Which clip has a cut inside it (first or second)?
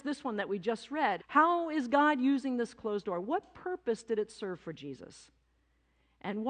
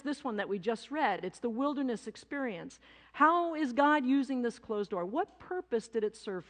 first